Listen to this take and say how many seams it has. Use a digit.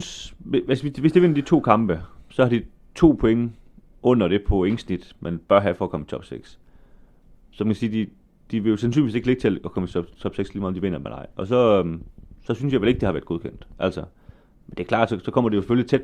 0